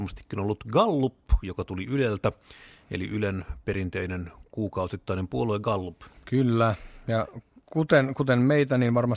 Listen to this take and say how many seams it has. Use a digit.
0